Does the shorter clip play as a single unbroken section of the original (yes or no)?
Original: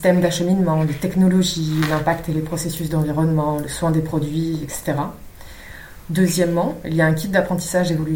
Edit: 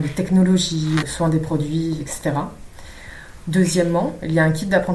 no